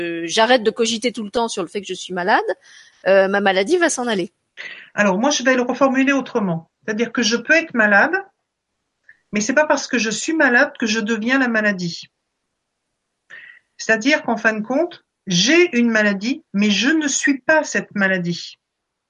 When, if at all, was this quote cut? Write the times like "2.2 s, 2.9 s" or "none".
none

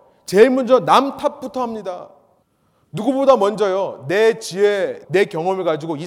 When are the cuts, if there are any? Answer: 5.0 s

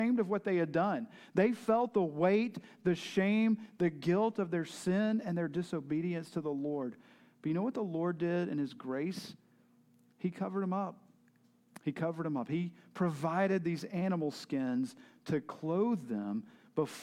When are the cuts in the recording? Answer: none

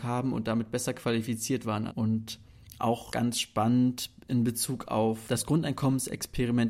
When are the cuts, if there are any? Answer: 1.9 s

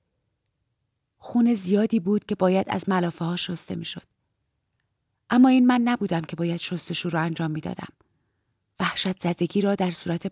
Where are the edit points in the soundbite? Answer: 1.0 s

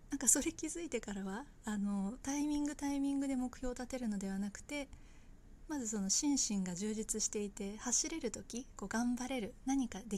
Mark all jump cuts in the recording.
none

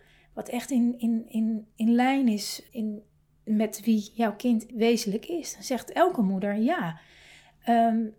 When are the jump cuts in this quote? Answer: 2.7 s, 4.7 s

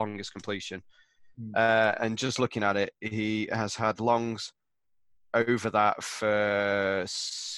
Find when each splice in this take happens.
none

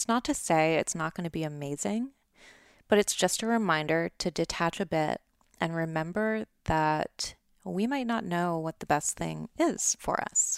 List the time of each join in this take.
none

